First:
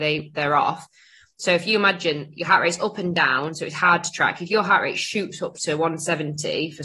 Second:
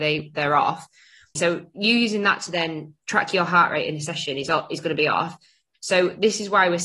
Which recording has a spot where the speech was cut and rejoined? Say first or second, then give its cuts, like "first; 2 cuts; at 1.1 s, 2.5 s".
second; 2 cuts; at 1.4 s, 5.7 s